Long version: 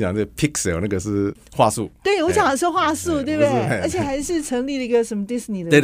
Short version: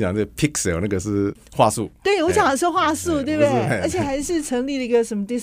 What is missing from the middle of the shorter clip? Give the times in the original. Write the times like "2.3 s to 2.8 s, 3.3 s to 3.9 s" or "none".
none

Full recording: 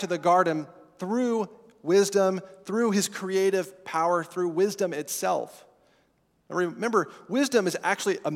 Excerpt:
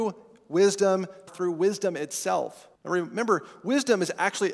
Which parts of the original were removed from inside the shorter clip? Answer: 2.6 s to 4.2 s, 5.7 s to 6.4 s

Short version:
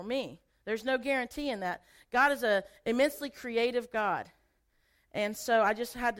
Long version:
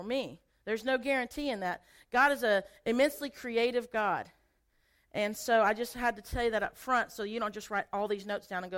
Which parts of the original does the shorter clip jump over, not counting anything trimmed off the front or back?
none

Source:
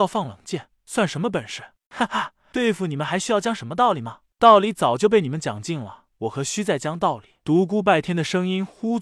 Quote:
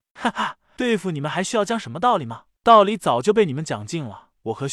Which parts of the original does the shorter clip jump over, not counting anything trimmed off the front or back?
none

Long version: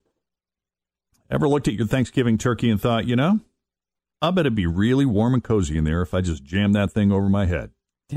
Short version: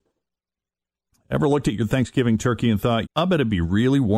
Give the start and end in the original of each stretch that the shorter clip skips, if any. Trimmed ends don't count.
3.0 s to 4.1 s

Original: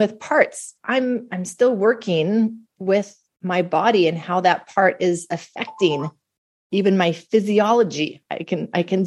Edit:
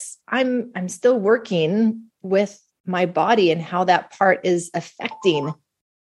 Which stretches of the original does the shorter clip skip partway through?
none

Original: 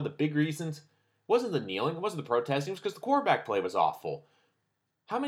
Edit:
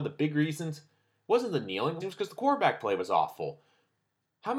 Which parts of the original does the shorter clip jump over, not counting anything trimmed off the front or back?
2.0 s to 2.7 s

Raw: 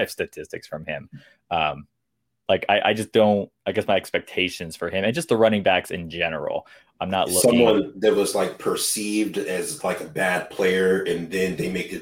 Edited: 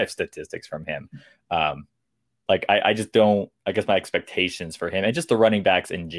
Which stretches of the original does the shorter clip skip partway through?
none

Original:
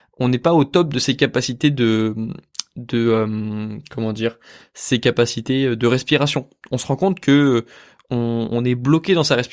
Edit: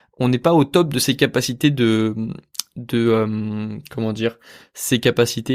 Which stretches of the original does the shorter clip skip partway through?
none

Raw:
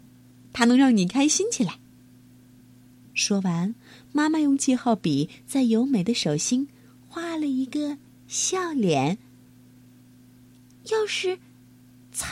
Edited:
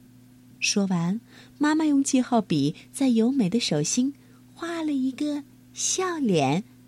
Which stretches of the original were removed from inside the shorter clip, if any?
none

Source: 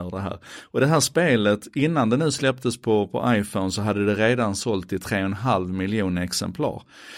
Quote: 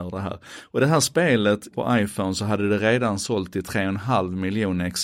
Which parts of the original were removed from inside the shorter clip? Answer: 1.7 s to 3.1 s

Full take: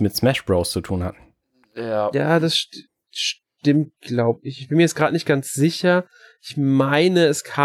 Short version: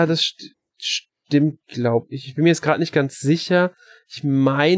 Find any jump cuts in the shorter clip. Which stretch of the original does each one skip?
none

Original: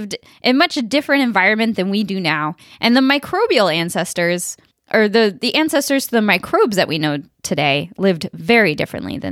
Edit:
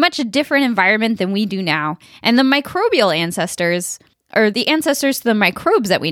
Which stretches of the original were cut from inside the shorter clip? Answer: 5.1 s to 5.4 s

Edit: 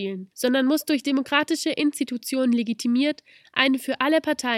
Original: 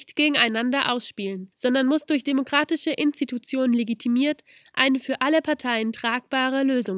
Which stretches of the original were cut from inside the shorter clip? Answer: none

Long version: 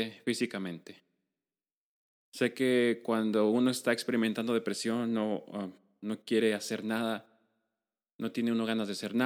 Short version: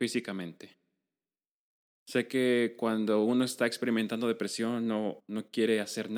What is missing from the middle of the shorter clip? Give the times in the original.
5.4 s to 5.9 s

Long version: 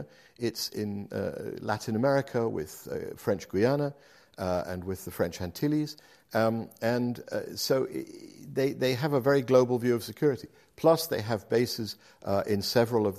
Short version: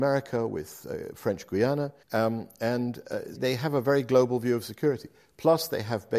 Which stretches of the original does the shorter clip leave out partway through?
4.0 s to 6.2 s, 7.6 s to 8.7 s

